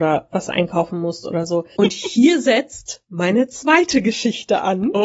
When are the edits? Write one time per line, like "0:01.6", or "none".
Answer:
0:01.8